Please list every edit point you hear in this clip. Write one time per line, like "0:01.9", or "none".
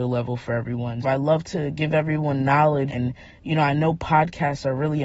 0:01.0
0:02.9